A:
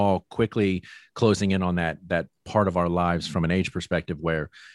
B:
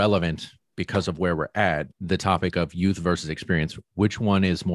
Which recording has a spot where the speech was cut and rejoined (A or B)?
B